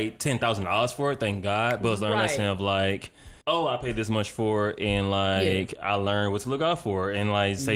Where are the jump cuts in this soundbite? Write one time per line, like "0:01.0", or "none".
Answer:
0:03.4